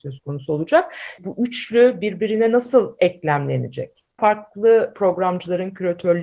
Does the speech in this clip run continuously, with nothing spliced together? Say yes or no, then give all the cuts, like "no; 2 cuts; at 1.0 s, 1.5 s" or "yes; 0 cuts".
no; 2 cuts; at 1.2 s, 4.2 s